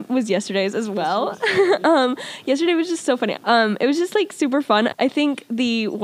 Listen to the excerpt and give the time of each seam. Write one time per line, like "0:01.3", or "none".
0:03.3
0:04.9

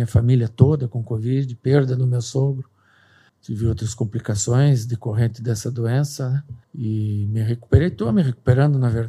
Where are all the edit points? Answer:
0:03.3
0:06.6

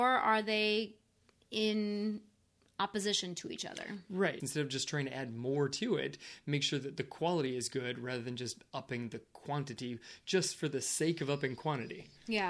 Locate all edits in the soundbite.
0:04.4

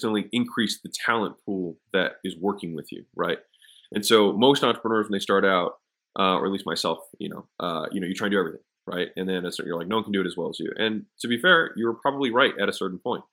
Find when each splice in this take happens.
none

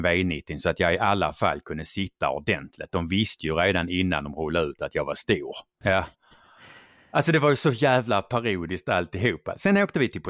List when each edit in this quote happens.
0:05.8

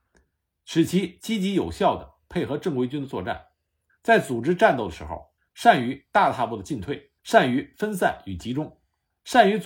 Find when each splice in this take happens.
0:03.9
0:05.4
0:07.2

